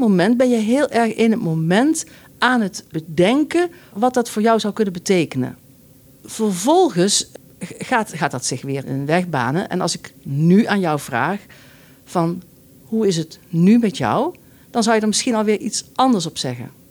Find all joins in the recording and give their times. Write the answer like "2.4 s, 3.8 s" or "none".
8.8 s